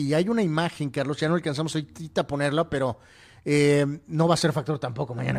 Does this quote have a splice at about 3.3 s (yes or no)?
no